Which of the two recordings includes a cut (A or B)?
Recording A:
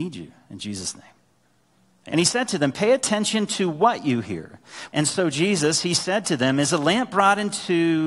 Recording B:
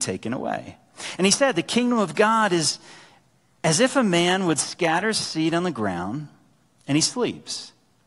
A